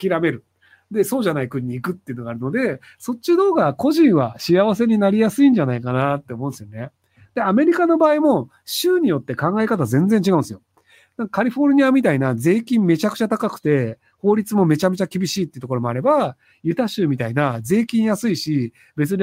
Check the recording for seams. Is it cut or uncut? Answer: uncut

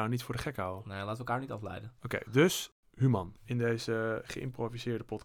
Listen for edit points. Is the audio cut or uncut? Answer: cut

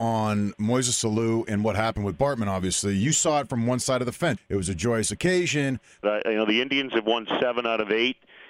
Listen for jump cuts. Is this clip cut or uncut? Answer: cut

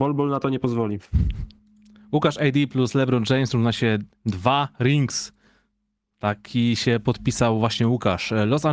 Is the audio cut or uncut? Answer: uncut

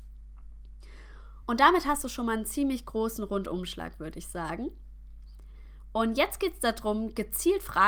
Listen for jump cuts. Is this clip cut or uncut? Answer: uncut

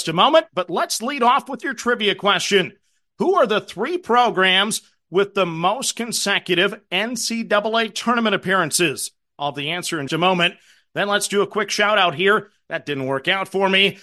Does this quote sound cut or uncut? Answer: cut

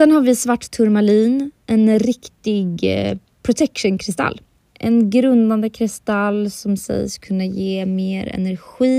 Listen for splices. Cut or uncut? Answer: cut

